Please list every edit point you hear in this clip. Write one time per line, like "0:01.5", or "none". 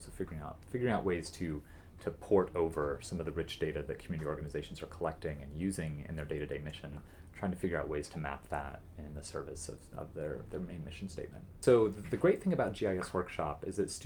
none